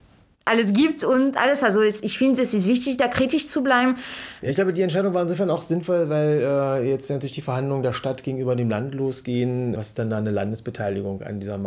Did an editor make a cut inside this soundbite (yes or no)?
yes